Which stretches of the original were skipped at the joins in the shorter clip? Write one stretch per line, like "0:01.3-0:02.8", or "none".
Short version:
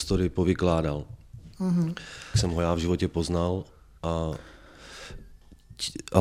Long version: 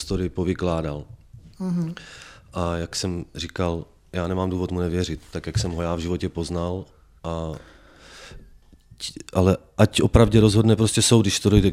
0:02.3-0:05.5